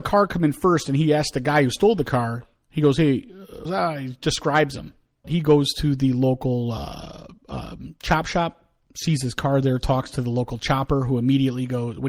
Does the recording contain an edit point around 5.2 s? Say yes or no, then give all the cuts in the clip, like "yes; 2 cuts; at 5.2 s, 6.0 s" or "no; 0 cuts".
yes; 2 cuts; at 3.7 s, 5.2 s